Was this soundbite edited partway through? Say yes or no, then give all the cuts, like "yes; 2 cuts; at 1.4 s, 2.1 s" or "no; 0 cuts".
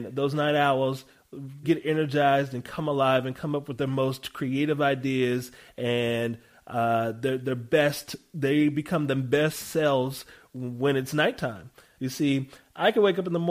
yes; 2 cuts; at 1.6 s, 12.0 s